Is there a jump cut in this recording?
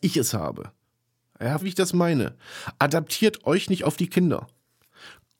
yes; 1 cut; at 1.6 s

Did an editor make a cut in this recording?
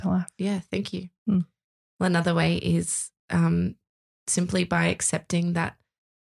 no; 0 cuts

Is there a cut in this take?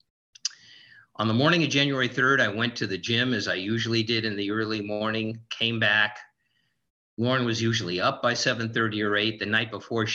no; 0 cuts

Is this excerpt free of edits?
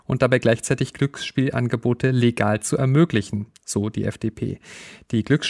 yes; 0 cuts

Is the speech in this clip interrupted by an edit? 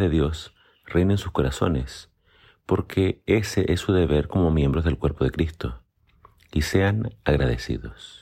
no; 0 cuts

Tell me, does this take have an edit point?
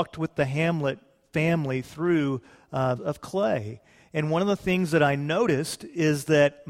yes; 1 cut; at 3.0 s

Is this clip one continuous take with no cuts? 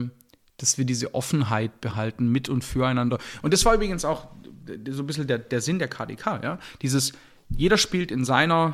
yes; 0 cuts

